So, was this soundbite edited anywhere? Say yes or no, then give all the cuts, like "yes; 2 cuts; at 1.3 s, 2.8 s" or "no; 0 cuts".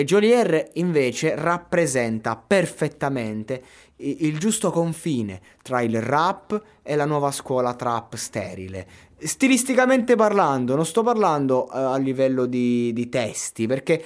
no; 0 cuts